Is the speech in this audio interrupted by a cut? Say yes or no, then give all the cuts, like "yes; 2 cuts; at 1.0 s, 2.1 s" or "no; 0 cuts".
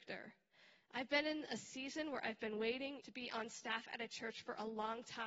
yes; 1 cut; at 3.0 s